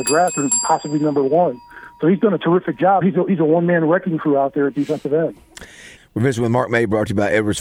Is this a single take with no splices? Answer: no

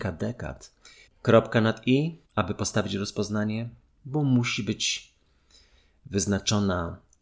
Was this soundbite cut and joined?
yes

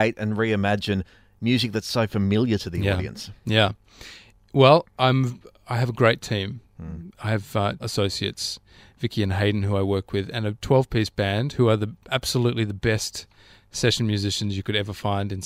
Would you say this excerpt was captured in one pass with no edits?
no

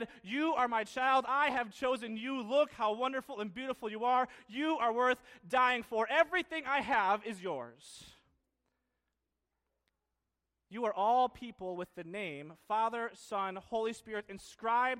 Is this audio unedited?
yes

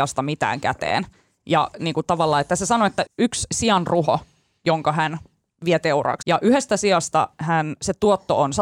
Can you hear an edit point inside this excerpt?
yes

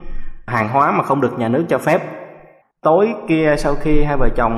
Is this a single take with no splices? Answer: no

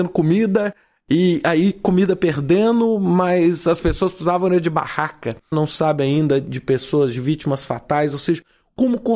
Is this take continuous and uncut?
no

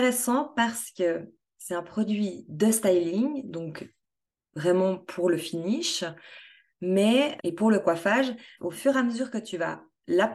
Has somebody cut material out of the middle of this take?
yes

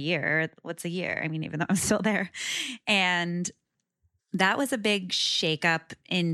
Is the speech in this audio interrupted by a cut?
no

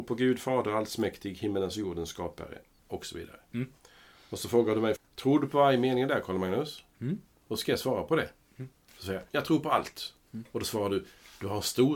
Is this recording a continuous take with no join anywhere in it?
no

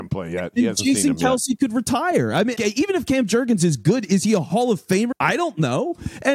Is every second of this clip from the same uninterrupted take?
no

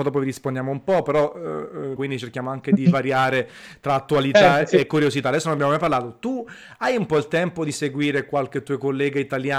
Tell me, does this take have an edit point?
yes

